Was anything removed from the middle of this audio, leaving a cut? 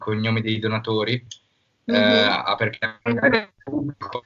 no; 0 cuts

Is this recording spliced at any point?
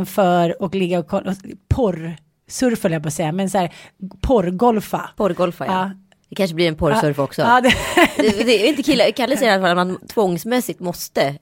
no; 0 cuts

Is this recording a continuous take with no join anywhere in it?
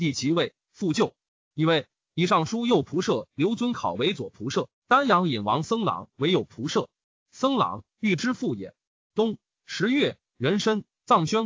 yes; 0 cuts

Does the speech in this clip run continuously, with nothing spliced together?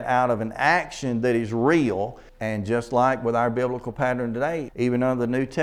no; 2 cuts; at 2.3 s, 4.7 s

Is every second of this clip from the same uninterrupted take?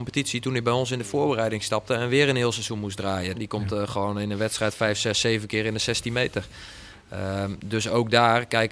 no; 1 cut; at 3.3 s

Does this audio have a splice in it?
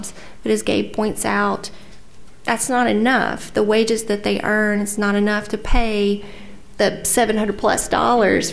no; 0 cuts

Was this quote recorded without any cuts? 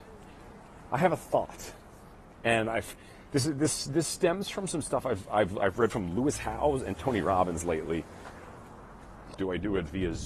no; 1 cut; at 9.4 s

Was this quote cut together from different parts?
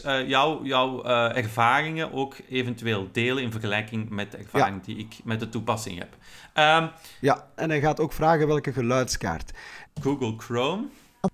yes; 2 cuts; at 7.6 s, 9.9 s

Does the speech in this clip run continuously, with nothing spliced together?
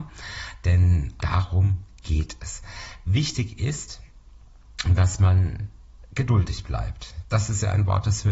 no; 1 cut; at 1.2 s

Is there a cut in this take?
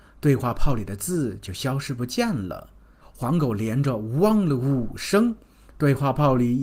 yes; 1 cut; at 3.0 s

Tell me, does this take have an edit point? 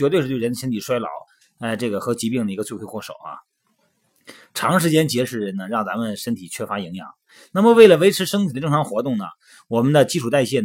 no; 0 cuts

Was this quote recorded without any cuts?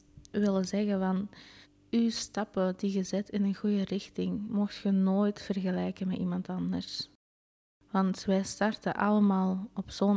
yes; 0 cuts

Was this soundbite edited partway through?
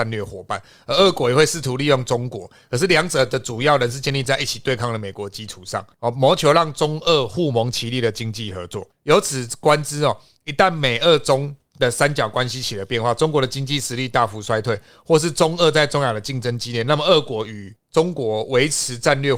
no; 0 cuts

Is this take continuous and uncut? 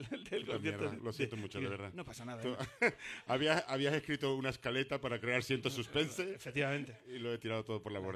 yes; 0 cuts

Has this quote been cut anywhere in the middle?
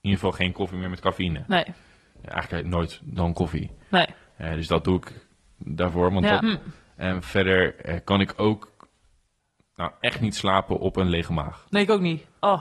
yes; 1 cut; at 6.4 s

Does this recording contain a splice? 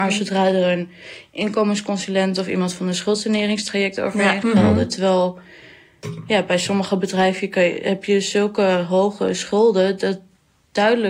yes; 1 cut; at 4.4 s

